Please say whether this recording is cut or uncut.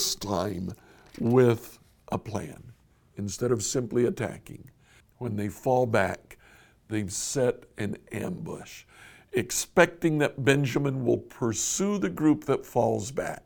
cut